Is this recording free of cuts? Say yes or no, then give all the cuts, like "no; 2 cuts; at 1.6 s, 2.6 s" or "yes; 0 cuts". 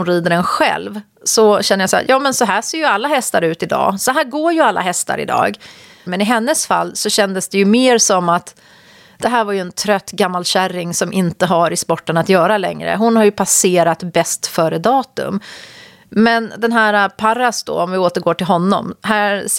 no; 1 cut; at 6.1 s